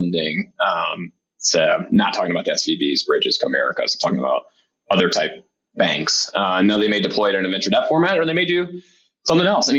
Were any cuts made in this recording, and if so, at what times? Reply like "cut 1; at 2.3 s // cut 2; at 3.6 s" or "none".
none